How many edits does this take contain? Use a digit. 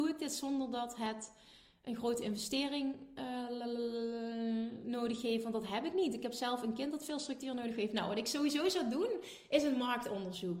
0